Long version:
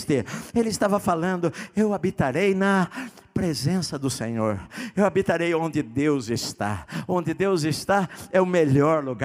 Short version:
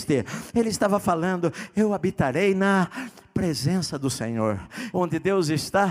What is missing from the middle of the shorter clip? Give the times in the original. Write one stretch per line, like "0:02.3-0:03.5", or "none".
0:04.9-0:07.1